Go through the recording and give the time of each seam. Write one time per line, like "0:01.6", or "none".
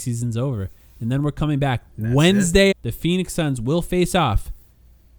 0:02.7